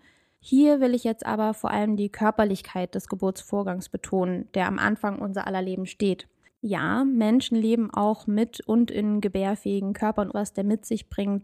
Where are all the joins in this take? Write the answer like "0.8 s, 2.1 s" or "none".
6.5 s, 10.3 s

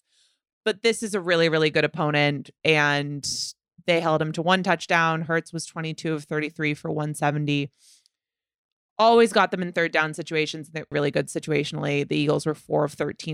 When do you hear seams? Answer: 10.9 s

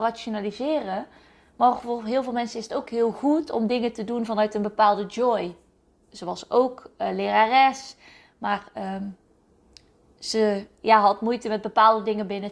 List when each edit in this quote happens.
6.1 s

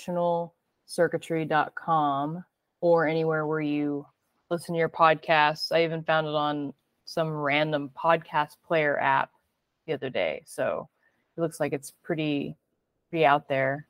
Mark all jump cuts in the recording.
none

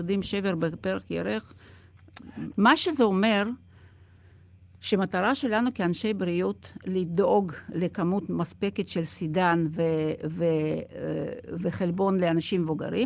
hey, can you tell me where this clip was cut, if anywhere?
2.5 s

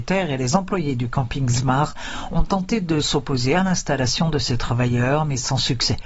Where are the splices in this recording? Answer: none

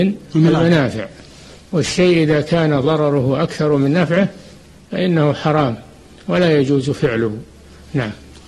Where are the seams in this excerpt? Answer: none

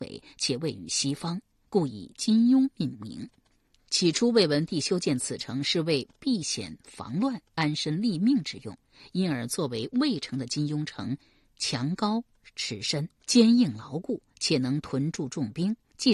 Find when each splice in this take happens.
none

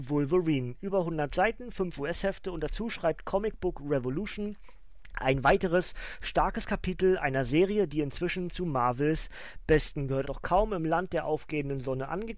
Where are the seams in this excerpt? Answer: 10.2 s

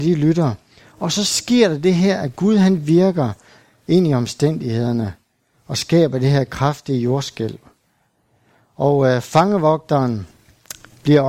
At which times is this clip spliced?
none

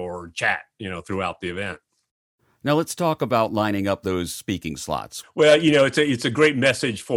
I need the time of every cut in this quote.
5.2 s

